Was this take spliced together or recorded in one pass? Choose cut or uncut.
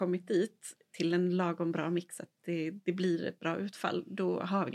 uncut